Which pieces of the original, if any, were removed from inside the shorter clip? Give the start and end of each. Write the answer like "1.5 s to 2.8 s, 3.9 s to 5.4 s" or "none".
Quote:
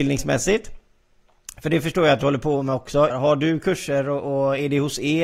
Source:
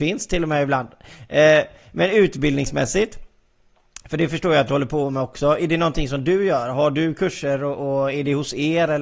5.6 s to 6.6 s